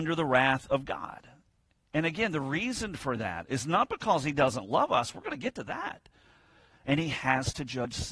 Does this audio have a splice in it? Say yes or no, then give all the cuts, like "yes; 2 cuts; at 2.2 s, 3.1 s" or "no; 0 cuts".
yes; 1 cut; at 6.7 s